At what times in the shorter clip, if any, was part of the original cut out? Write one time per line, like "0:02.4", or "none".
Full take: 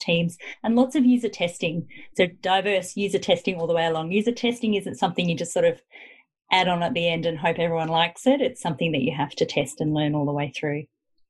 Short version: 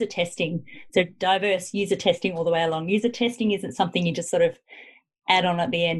none